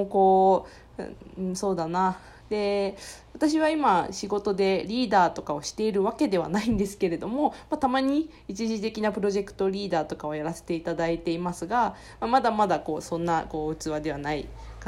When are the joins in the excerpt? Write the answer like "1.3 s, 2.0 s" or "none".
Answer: 2.4 s